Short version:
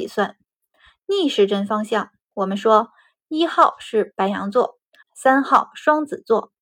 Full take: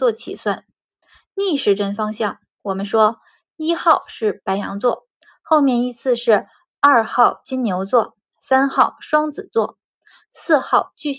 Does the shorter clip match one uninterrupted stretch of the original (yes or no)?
no